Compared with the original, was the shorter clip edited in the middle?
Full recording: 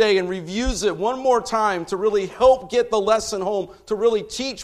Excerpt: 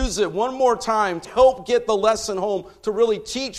yes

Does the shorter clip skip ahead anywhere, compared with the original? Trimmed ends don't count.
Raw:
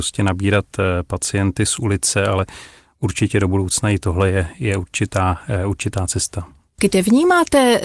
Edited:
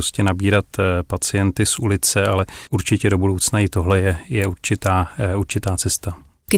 yes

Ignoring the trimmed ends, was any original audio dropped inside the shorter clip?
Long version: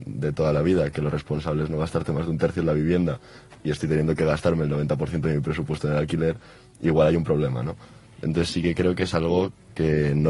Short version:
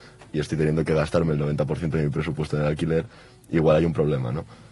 no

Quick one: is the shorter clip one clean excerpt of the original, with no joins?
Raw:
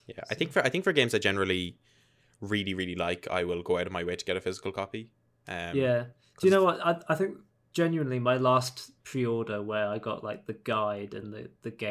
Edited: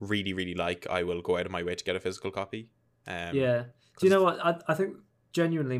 yes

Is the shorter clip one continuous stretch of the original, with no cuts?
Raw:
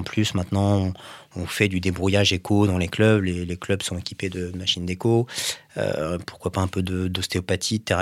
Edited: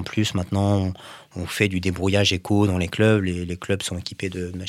yes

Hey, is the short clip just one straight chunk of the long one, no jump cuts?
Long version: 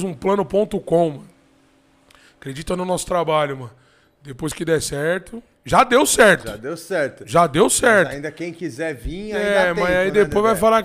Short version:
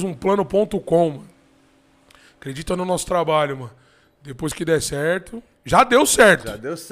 yes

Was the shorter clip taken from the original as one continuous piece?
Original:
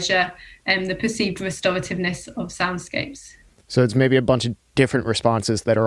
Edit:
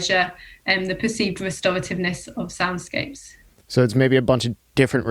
yes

